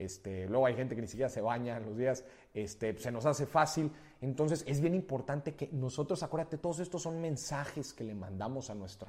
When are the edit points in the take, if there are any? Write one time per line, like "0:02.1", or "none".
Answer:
none